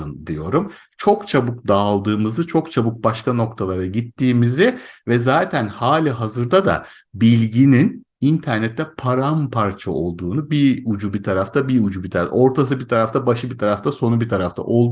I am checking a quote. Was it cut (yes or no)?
no